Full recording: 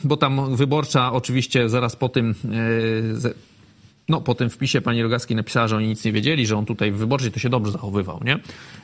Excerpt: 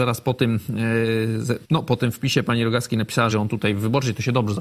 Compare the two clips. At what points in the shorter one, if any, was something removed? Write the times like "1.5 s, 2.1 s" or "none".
1.6 s, 3.3 s